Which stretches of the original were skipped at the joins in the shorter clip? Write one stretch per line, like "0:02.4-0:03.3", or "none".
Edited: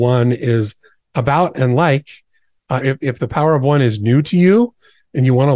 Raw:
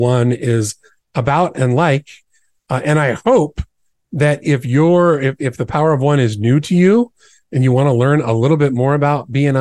0:02.8-0:05.2

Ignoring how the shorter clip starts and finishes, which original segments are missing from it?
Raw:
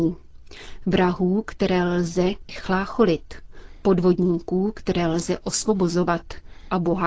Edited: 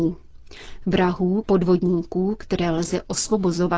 0:01.4-0:03.8

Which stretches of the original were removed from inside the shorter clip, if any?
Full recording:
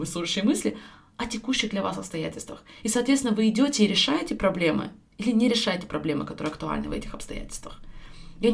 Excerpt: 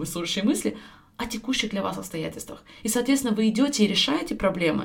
none

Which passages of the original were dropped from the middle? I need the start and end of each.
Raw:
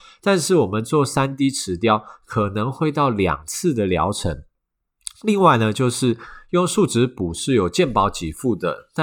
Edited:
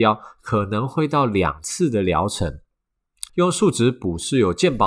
0:05.1-0:06.5

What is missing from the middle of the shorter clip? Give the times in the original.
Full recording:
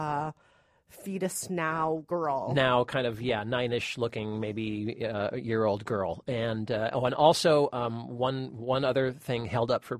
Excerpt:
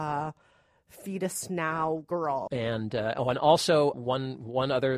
0:02.5-0:06.2
0:07.7-0:08.1

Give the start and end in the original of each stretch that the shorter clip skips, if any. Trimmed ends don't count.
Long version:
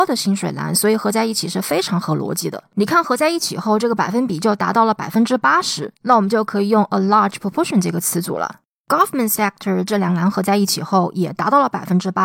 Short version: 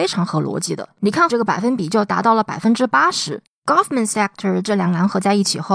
0:03.0-0:03.8
0:06.0-0:08.7

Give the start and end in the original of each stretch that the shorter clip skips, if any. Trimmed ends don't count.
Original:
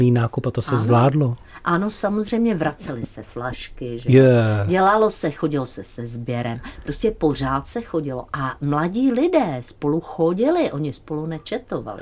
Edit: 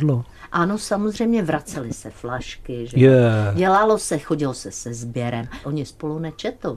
0:06.8-0:10.7

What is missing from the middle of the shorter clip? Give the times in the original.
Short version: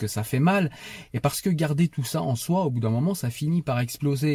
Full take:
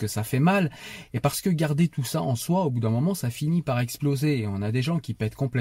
none

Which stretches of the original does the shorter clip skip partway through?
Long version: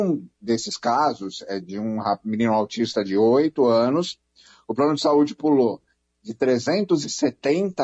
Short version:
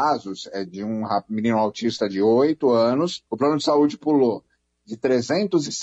0:04.2-0:04.6

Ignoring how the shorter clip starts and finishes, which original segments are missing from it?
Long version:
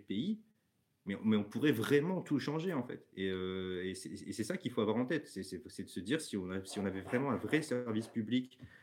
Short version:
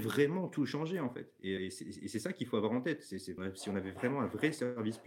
0:03.3-0:03.8
0:05.6-0:06.5

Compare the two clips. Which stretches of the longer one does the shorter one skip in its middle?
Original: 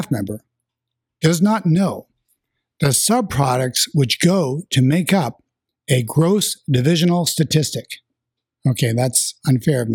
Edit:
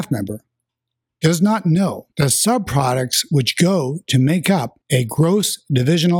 0:02.1-0:02.7
0:05.4-0:05.8

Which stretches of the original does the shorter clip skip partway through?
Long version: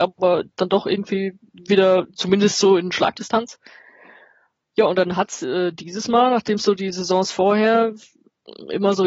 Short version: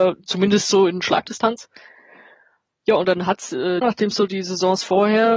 0:05.7-0:06.3

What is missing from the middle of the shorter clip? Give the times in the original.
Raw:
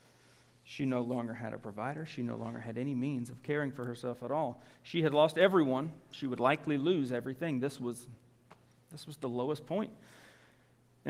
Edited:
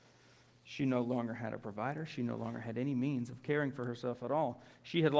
none

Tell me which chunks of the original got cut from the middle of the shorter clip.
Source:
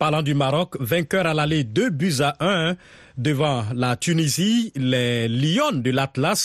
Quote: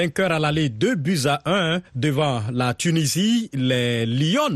0:02.8-0:03.1

